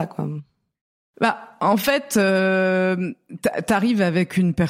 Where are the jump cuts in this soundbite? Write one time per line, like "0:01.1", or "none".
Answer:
none